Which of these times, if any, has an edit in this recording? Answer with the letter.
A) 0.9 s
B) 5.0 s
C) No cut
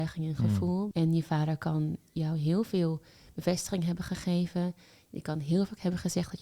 A